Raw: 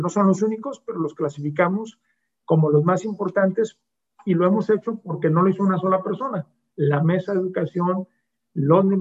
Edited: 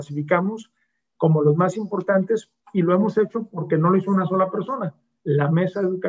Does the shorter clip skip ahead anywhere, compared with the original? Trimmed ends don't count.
yes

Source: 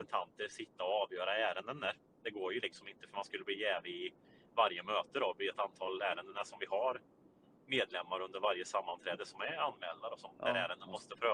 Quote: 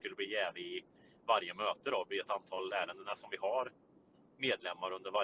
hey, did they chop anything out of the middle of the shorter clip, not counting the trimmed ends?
no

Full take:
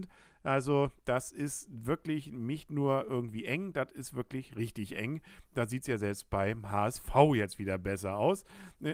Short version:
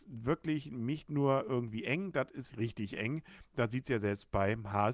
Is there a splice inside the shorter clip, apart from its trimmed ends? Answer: yes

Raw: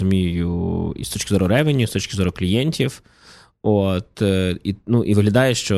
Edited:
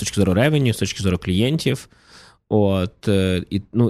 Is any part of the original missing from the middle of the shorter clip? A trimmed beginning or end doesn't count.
no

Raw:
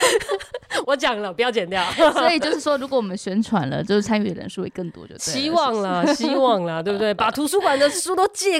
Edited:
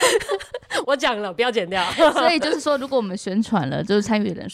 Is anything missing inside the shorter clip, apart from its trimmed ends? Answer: no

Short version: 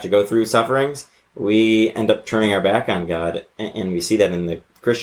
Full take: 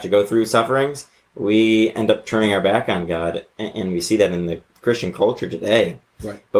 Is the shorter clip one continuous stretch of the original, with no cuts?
yes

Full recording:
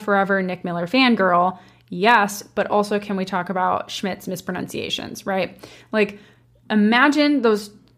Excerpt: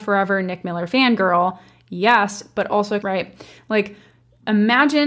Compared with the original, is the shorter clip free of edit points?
no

